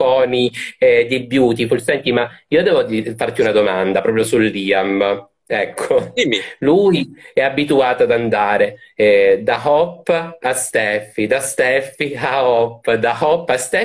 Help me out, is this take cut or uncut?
uncut